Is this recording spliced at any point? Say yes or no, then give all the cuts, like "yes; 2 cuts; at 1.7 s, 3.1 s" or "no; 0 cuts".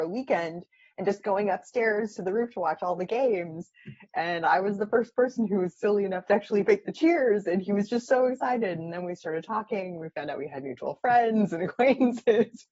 no; 0 cuts